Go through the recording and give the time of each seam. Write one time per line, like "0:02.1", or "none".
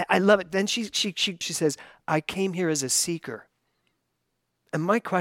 0:01.4